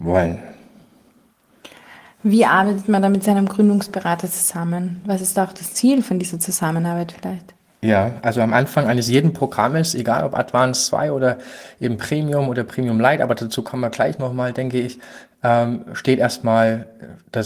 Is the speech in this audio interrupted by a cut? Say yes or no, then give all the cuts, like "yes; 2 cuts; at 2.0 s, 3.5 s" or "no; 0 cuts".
no; 0 cuts